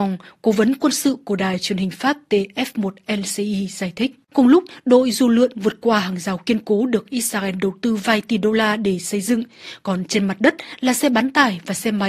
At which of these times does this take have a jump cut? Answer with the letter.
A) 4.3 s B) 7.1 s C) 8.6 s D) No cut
A